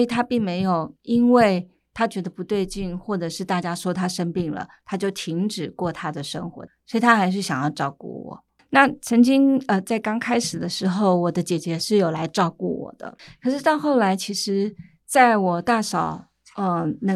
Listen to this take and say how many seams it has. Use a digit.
2